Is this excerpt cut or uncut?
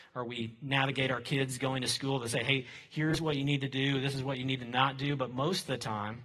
uncut